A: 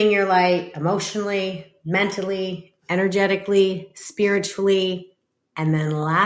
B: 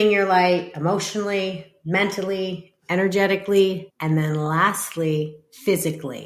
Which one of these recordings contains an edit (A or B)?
B